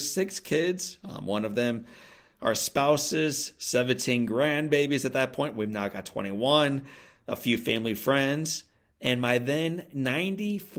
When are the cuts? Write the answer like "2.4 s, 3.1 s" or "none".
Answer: none

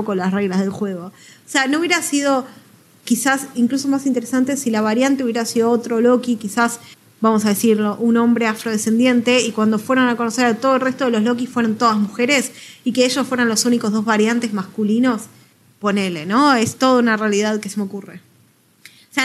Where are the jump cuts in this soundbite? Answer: none

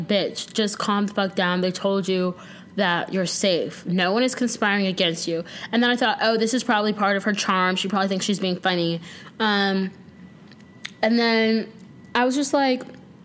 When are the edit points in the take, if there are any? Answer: none

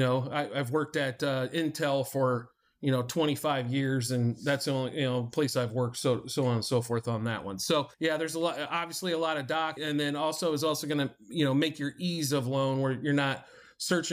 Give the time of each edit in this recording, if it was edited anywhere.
7.9 s, 9.8 s

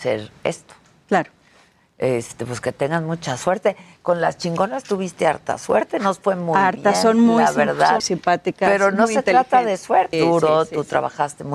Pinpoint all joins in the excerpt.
8.0 s, 10.1 s

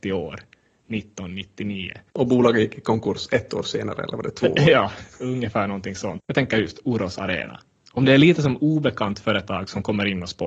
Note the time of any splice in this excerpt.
6.2 s

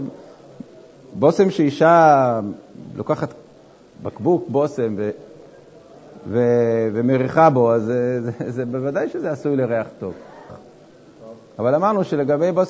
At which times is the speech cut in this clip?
10.5 s

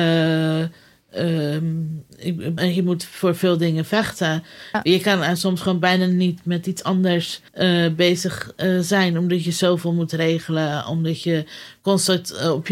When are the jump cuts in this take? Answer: 2.6 s, 4.7 s, 7.5 s

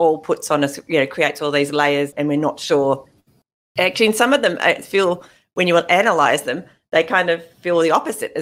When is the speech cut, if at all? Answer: none

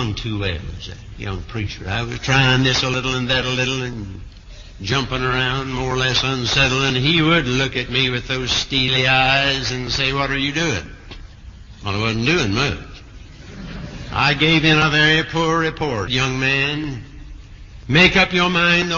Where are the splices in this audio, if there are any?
16.1 s

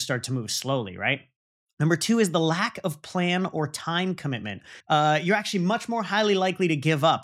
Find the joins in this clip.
4.8 s

